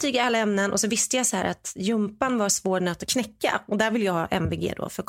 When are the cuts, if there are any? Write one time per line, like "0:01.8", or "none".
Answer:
none